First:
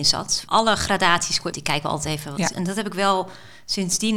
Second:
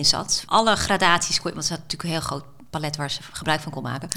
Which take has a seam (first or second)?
first